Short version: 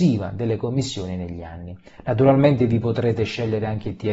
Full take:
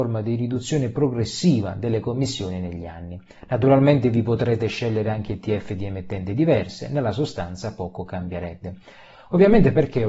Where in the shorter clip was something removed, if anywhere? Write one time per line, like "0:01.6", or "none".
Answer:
none